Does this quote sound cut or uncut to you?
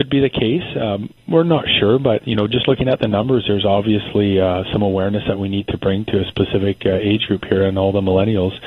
uncut